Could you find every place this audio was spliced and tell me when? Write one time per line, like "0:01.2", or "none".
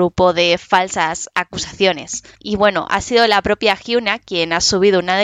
0:02.3